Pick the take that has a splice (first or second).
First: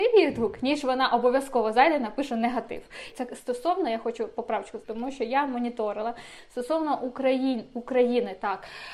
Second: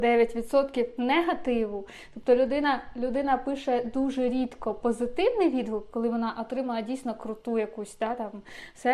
first